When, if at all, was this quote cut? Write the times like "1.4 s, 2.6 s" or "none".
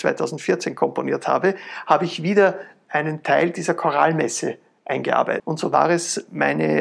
5.4 s